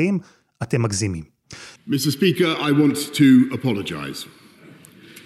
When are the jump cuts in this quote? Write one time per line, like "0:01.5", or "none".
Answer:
0:01.8